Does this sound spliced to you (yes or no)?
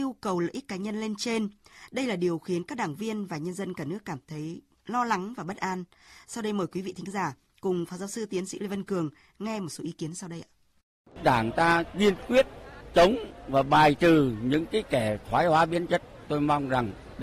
yes